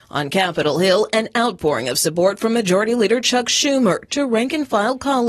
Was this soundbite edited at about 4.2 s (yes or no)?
no